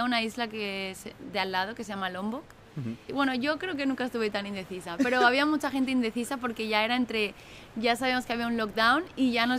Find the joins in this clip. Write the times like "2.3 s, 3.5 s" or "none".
3.1 s